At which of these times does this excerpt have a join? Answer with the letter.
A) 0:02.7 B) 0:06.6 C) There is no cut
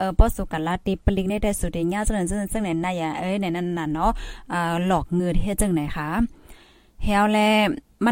C